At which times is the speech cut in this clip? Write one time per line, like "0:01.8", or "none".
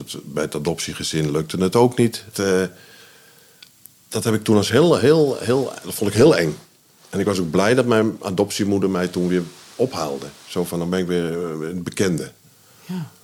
0:02.3